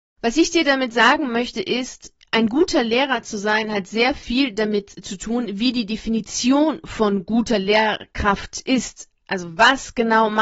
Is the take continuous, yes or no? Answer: yes